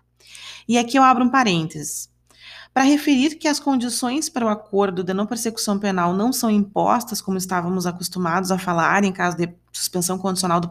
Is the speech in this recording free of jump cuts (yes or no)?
yes